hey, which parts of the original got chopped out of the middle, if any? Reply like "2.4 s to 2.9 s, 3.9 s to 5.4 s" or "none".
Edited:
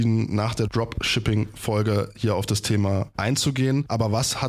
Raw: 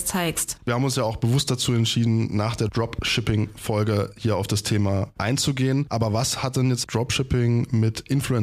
none